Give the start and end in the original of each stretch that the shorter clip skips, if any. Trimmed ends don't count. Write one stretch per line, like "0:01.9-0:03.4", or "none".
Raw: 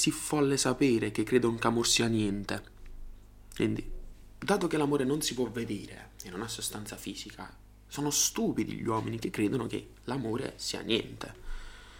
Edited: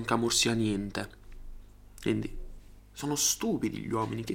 0:04.3-0:07.7